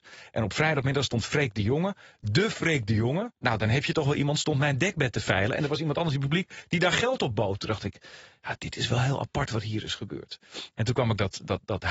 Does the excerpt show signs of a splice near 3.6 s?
no; 0 cuts

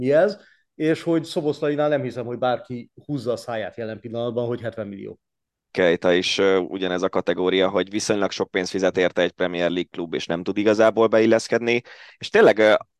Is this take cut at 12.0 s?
no; 1 cut; at 5.7 s

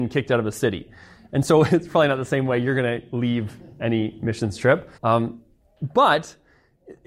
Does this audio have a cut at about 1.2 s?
no; 1 cut; at 5.0 s

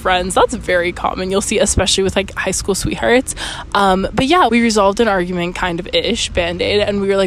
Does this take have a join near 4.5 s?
yes; 1 cut; at 4.5 s

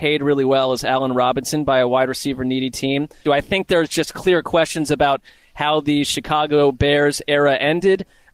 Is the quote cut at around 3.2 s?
yes; 1 cut; at 3.2 s

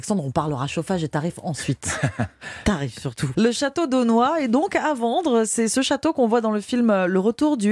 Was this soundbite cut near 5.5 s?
no; 1 cut; at 3.3 s

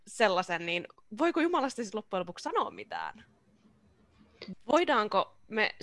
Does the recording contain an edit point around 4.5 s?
yes; 1 cut; at 4.5 s

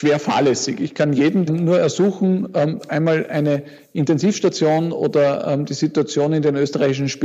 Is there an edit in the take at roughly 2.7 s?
no; 1 cut; at 1.5 s

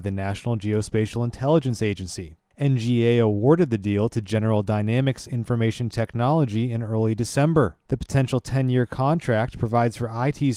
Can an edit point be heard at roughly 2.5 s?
no; 0 cuts

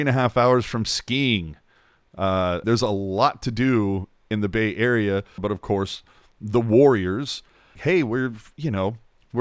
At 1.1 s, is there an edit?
no; 3 cuts; at 2.6 s, 5.4 s, 7.8 s

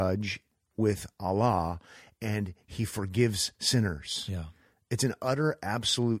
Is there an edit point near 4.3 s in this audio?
no; 0 cuts

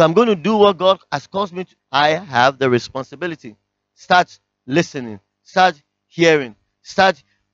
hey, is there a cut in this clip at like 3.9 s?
no; 1 cut; at 1.8 s

